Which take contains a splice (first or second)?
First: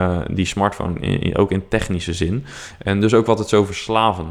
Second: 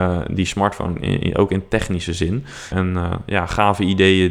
second